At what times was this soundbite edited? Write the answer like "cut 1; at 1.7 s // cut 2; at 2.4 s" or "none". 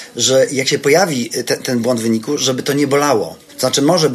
none